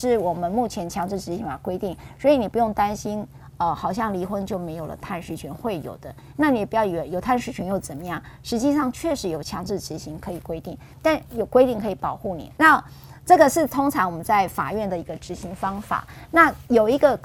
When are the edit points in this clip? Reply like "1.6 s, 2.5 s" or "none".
12.6 s